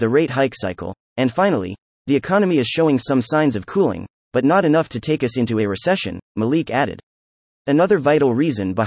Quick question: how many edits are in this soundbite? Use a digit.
0